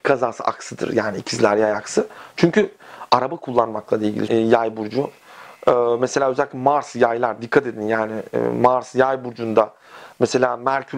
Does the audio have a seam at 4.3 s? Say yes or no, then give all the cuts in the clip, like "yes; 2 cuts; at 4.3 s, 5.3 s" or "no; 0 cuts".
yes; 1 cut; at 4.3 s